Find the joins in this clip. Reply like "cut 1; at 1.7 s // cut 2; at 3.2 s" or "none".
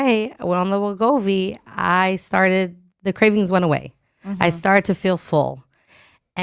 none